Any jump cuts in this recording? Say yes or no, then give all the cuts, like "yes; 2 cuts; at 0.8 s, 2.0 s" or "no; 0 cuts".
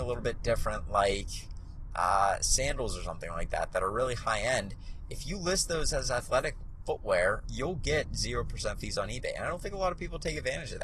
yes; 1 cut; at 7.4 s